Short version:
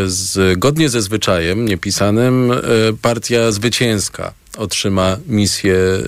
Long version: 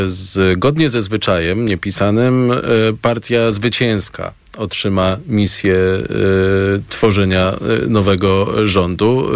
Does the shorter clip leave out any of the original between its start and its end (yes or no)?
no